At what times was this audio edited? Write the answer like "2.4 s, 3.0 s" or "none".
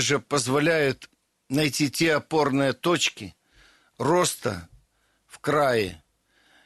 none